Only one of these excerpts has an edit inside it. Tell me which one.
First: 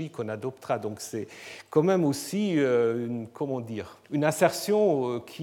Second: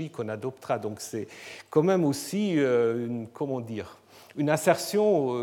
first; 1 cut; at 4.0 s

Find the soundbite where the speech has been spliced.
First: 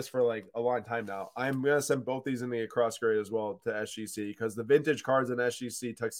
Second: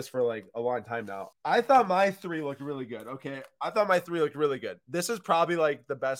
second; 1 cut; at 1.3 s

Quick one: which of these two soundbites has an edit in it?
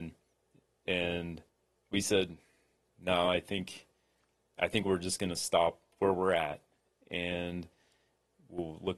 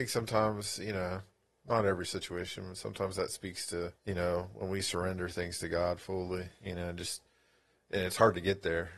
second; 1 cut; at 4.0 s

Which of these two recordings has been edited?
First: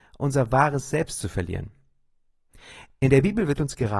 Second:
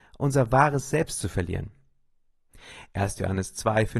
second; 1 cut; at 2.9 s

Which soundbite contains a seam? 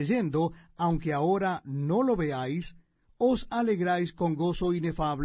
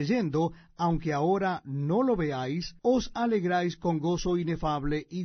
second; 1 cut; at 2.8 s

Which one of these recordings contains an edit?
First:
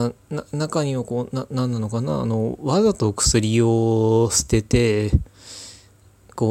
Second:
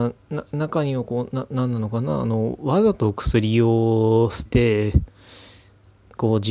second; 1 cut; at 4.5 s

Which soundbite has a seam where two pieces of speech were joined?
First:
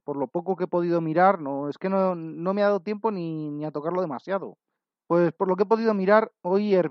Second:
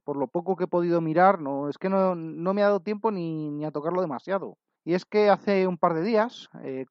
second; 1 cut; at 4.8 s

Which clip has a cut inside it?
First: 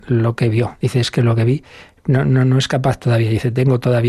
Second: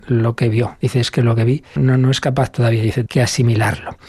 second; 2 cuts; at 1.8 s, 3.1 s

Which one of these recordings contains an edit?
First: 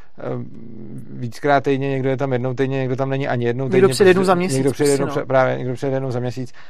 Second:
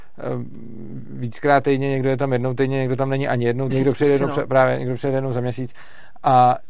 second; 1 cut; at 3.7 s

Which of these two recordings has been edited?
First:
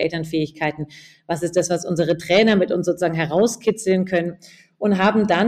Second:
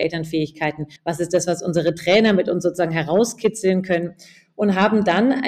second; 1 cut; at 1.0 s

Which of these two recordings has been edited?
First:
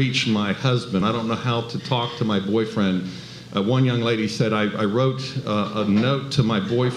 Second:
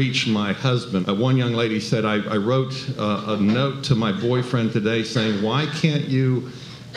second; 1 cut; at 1.0 s

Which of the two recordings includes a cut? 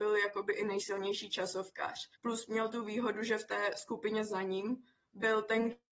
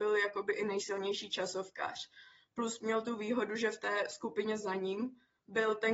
first; 1 cut; at 2.1 s

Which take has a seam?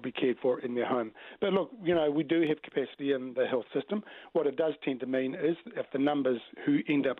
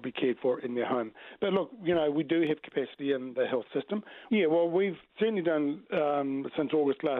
second; 1 cut; at 4.3 s

